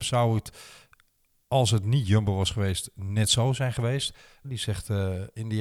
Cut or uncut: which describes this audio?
cut